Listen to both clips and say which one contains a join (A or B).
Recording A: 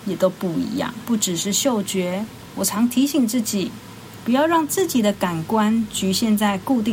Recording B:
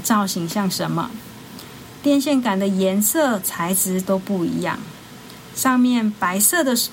A